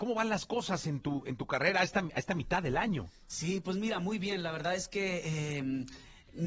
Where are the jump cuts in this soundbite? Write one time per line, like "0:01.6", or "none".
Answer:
none